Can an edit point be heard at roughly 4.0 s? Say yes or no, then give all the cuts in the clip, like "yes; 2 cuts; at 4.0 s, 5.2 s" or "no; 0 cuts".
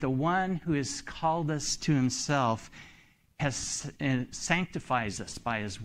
no; 0 cuts